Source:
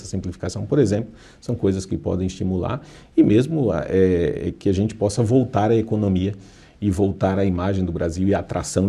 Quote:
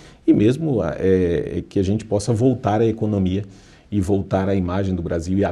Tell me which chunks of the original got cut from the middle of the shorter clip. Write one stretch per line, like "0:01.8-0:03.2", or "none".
none